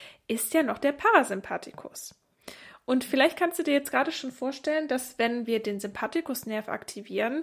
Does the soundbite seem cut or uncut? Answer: uncut